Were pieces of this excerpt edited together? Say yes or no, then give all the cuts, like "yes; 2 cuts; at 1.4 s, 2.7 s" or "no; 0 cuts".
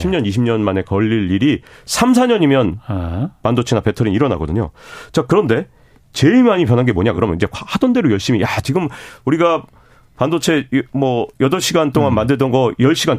no; 0 cuts